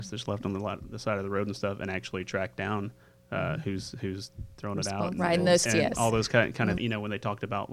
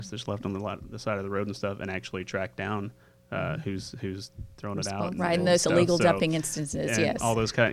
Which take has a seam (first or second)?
first